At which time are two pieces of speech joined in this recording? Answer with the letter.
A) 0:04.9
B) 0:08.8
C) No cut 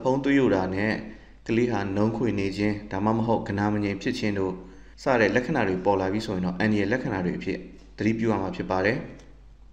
A